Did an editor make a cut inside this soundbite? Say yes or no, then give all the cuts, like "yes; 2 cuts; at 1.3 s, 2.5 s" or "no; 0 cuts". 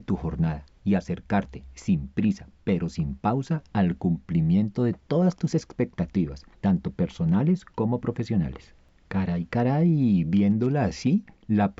no; 0 cuts